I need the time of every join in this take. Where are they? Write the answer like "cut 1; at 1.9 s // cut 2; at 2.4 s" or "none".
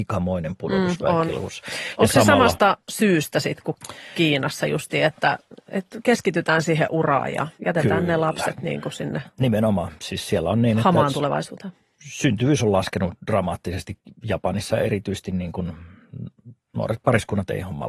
none